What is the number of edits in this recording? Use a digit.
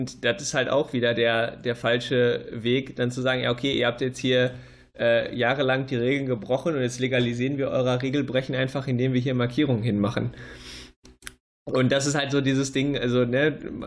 0